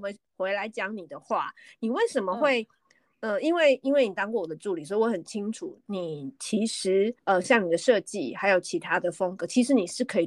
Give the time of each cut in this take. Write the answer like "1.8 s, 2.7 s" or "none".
7.2 s